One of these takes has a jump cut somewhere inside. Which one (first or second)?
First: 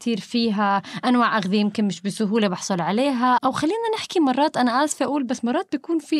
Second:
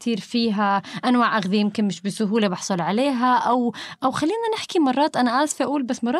first